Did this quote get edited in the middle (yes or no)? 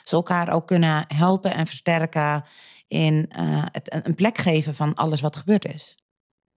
no